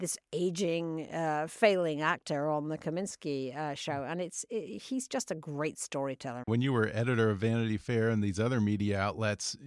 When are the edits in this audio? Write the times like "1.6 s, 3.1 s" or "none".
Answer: 6.4 s